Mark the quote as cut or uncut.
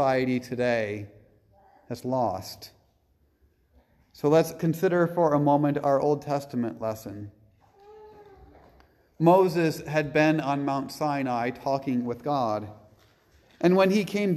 uncut